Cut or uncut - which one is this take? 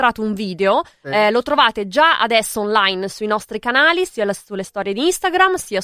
cut